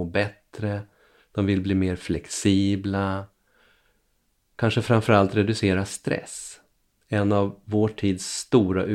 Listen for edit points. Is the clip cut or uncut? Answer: uncut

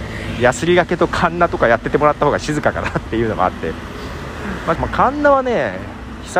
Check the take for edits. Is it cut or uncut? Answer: cut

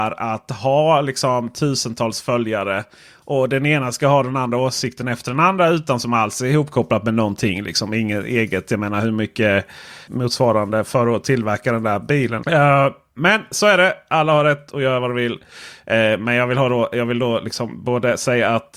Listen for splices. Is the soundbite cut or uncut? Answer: cut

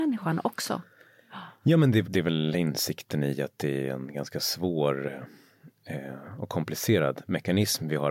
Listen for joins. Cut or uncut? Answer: cut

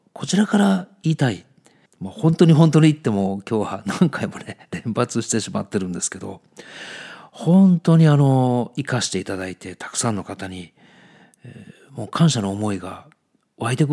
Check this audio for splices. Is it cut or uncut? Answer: cut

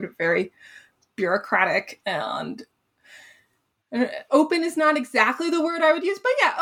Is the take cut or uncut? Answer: cut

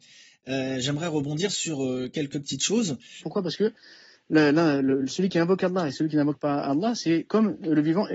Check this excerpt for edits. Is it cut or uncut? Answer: cut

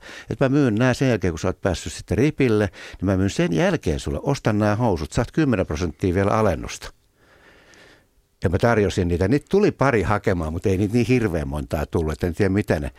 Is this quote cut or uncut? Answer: uncut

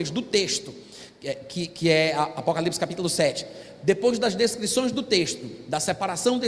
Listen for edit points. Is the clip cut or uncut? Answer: uncut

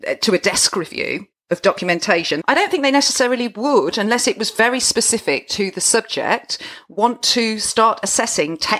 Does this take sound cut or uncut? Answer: cut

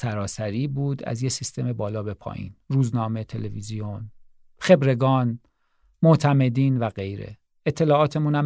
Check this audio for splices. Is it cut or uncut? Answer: uncut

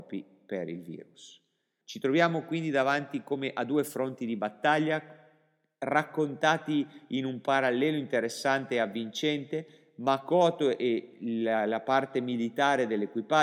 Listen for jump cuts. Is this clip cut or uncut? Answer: cut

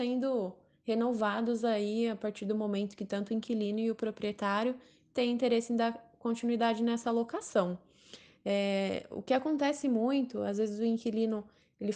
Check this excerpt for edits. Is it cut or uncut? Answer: uncut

